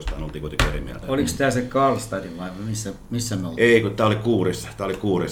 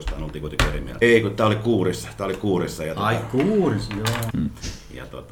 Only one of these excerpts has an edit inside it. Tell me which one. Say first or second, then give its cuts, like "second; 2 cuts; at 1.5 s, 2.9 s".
second; 2 cuts; at 1.0 s, 4.3 s